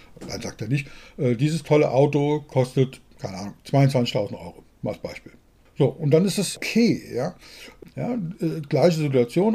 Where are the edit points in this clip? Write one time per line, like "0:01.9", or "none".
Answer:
0:07.9